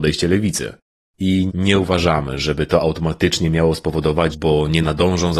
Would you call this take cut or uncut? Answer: cut